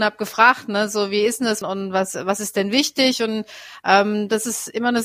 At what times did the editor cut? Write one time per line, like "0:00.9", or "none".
0:01.6